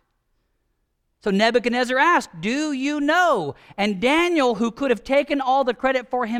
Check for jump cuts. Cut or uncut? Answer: uncut